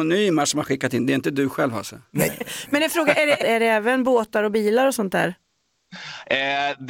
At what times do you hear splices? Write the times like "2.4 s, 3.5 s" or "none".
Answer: 2.3 s, 3.4 s